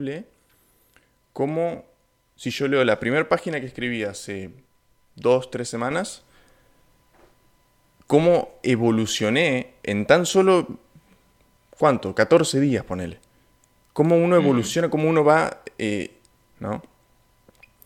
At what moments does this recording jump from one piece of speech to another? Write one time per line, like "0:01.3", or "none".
0:16.4

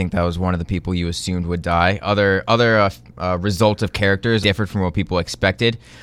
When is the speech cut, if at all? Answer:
0:04.4

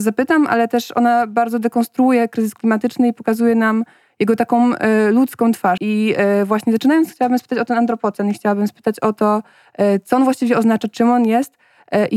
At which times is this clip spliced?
0:05.8

